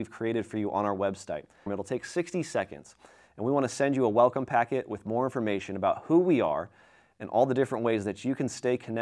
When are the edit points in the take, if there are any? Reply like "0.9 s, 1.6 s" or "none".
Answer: 1.7 s